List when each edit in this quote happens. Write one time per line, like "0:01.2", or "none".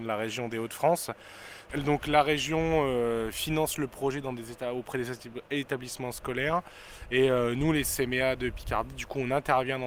none